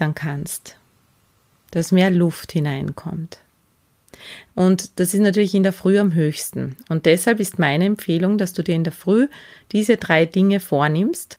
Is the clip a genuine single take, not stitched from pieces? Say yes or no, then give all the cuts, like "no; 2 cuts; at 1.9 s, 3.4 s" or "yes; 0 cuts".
no; 1 cut; at 4.5 s